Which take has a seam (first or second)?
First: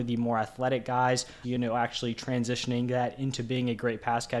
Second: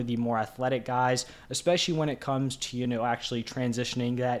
first